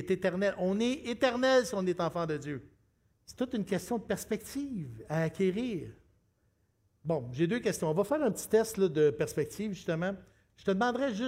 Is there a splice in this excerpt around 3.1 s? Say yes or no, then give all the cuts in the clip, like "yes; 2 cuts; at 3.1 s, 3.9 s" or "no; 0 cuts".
yes; 1 cut; at 3.1 s